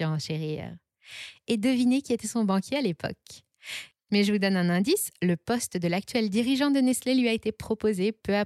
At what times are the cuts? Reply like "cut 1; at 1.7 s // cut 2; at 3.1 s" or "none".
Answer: cut 1; at 3.9 s